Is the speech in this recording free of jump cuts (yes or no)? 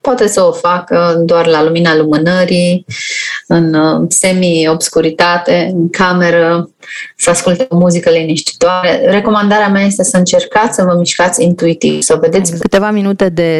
no